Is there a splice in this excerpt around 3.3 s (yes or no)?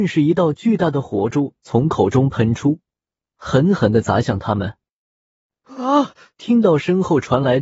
no